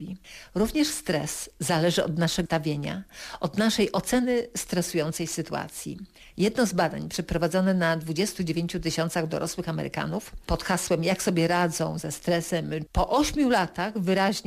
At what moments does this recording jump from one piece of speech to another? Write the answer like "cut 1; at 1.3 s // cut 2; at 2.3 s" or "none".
cut 1; at 2.5 s // cut 2; at 12.9 s